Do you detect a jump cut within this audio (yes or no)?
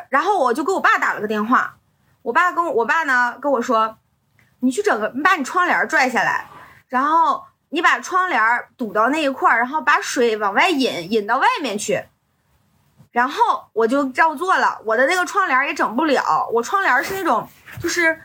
no